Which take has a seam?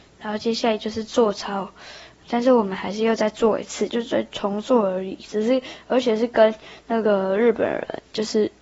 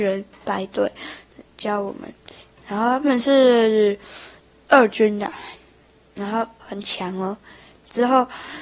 first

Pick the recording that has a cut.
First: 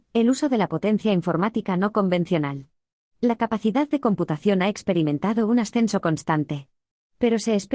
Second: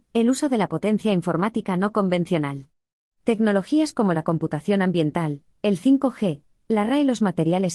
second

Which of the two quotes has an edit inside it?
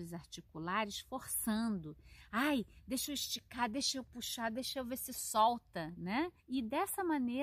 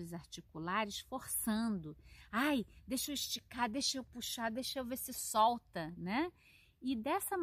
first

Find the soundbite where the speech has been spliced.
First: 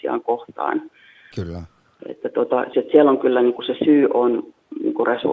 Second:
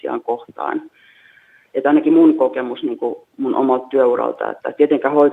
first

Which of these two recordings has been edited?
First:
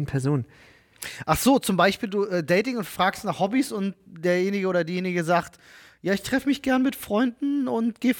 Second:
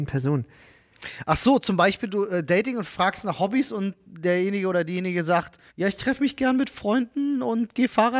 second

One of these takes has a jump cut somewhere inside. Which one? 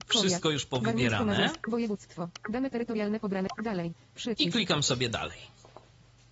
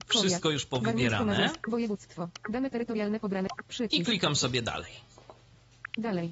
second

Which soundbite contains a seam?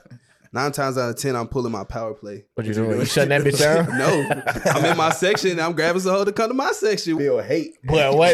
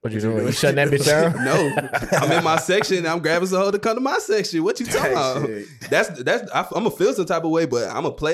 first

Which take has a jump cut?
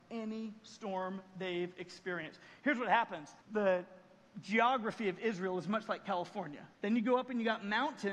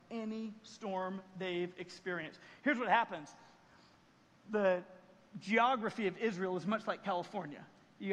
first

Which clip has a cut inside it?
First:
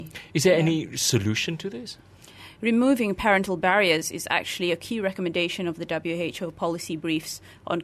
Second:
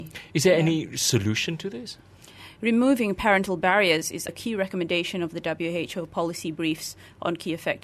second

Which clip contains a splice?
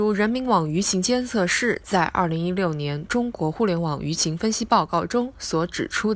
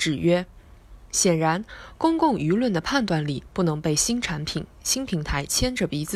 second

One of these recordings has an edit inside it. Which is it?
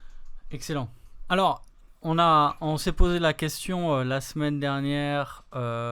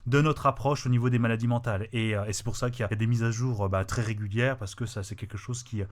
second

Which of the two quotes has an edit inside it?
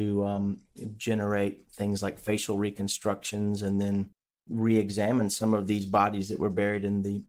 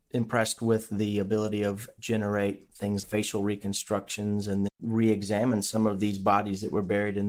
second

